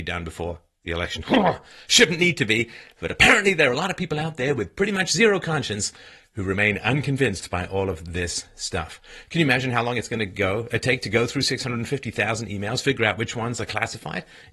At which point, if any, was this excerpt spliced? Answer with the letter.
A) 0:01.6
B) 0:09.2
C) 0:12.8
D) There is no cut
B